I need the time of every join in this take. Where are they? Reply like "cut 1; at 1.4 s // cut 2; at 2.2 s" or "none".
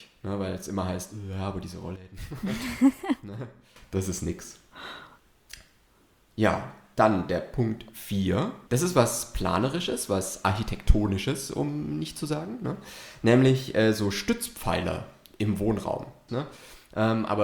cut 1; at 8.7 s // cut 2; at 16.3 s